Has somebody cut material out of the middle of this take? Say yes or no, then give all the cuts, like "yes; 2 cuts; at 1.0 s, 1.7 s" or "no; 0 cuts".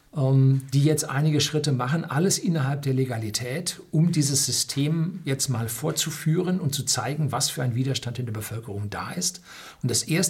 no; 0 cuts